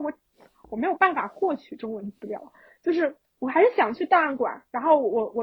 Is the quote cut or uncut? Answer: uncut